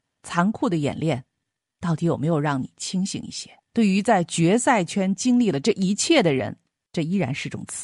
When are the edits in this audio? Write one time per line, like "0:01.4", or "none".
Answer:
0:03.7
0:06.7